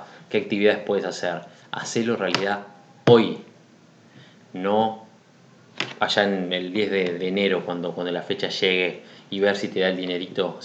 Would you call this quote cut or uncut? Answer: cut